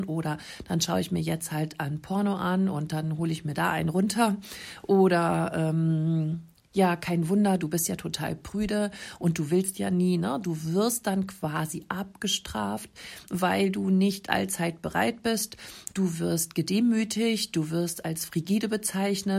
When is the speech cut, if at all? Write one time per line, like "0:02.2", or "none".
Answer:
none